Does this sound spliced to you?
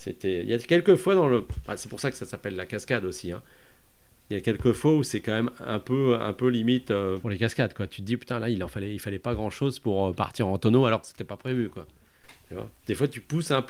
no; 0 cuts

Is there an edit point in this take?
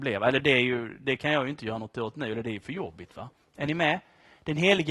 no; 0 cuts

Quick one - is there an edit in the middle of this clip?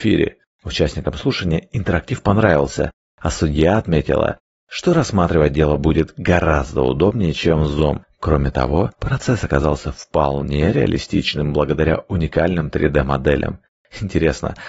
no; 0 cuts

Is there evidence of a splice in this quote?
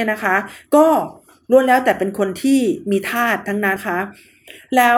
yes; 1 cut; at 3.8 s

